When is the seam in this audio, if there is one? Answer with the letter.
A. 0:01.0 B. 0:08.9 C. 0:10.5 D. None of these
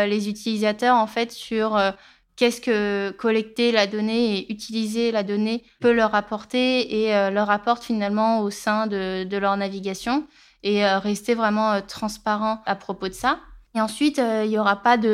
D